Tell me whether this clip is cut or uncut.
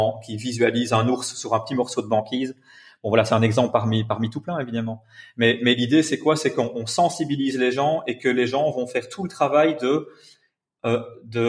uncut